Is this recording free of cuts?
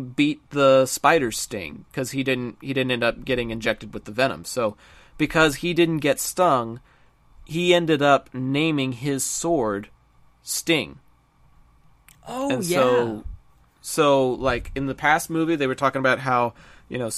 yes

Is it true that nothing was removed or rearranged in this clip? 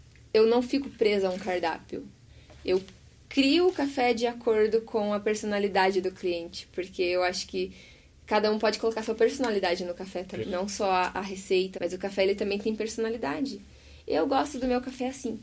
no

